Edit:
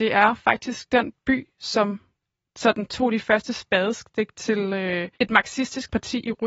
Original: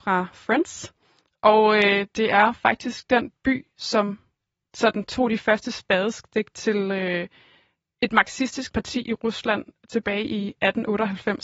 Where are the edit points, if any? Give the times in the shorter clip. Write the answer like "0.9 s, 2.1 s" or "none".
5.1 s